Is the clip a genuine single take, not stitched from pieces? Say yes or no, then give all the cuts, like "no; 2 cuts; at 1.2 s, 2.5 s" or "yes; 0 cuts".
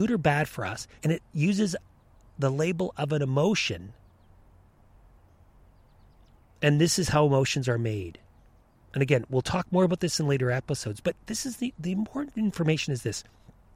no; 1 cut; at 1.0 s